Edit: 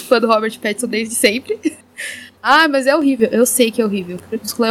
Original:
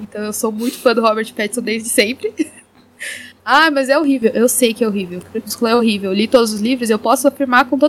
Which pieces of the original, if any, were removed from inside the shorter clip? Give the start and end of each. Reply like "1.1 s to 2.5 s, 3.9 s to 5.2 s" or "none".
2.5 s to 2.8 s